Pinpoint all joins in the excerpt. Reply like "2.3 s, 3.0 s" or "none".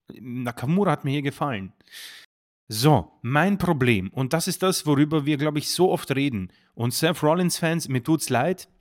none